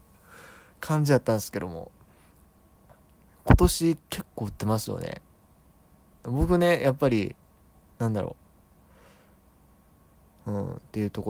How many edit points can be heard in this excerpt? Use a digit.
1